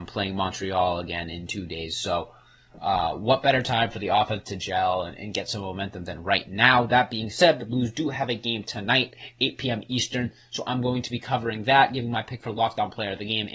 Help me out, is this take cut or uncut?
uncut